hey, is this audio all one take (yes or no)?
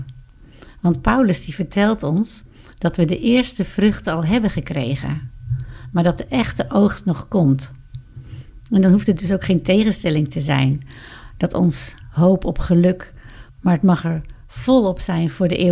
no